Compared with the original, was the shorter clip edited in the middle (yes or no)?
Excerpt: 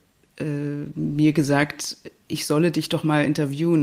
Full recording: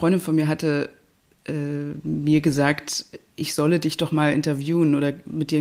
no